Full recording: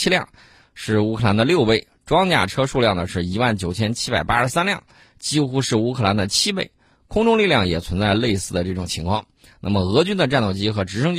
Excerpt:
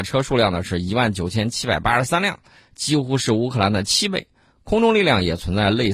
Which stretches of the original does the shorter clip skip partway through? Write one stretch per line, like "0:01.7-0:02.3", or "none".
none